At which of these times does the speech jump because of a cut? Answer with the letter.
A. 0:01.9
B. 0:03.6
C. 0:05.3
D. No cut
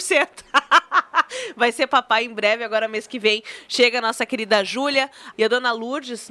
C